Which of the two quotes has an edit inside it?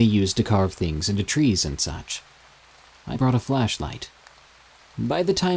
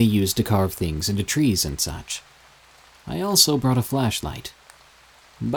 first; 1 cut; at 3.1 s

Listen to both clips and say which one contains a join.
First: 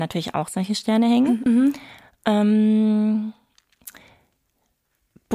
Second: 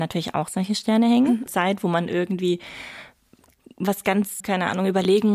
second; 2 cuts; at 1.5 s, 4.4 s

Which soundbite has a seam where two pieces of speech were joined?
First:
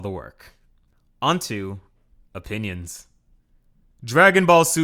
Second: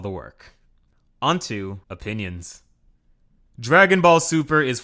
second; 1 cut; at 1.8 s

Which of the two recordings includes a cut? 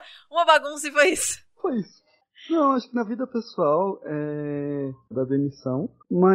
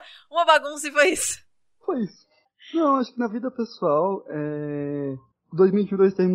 first; 2 cuts; at 1.5 s, 5.1 s

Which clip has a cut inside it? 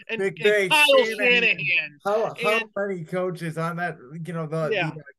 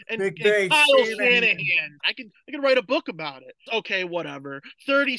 second; 2 cuts; at 2.0 s, 3.7 s

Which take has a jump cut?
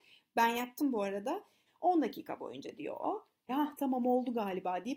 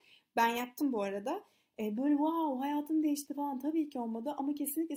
first; 2 cuts; at 1.7 s, 3.5 s

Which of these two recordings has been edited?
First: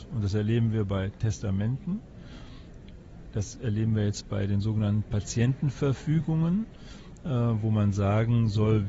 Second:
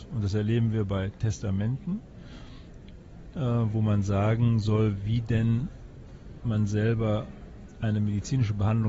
second; 1 cut; at 3.3 s

